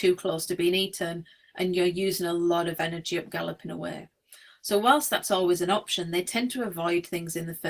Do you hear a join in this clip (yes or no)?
no